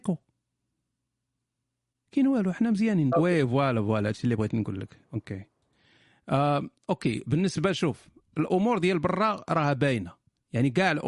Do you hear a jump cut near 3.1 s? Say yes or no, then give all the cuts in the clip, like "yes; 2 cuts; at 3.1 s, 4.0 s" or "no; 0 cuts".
yes; 1 cut; at 3.1 s